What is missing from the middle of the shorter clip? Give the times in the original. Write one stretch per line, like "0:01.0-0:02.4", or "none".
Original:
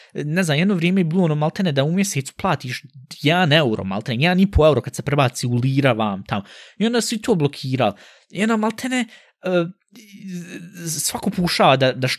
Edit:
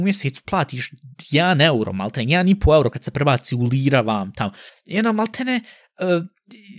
0:06.6-0:08.1